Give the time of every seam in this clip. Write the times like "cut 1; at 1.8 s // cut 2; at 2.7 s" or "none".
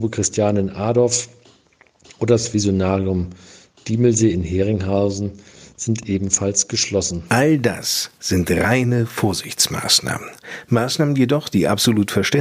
none